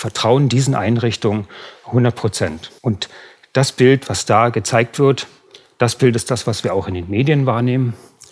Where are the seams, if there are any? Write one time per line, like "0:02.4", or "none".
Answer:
0:02.8